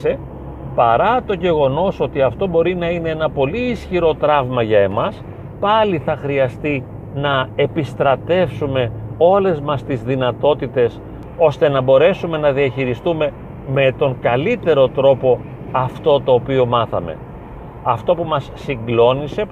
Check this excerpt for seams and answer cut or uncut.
uncut